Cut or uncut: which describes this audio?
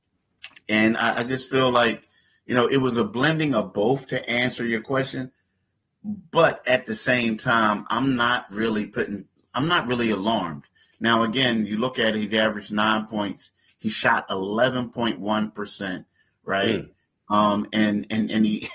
uncut